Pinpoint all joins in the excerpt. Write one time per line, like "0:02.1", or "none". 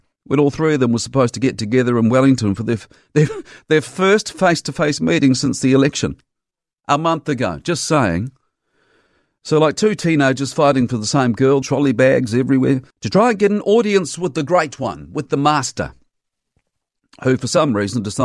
0:11.6
0:12.9